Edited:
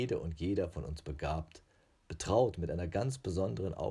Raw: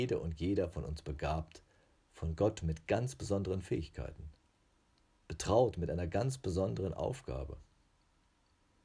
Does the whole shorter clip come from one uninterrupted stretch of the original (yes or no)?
no